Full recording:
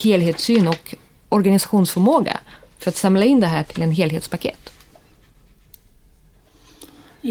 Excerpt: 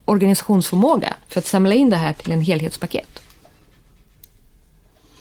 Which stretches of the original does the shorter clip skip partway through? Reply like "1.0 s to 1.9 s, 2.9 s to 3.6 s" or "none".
2.5 s to 2.7 s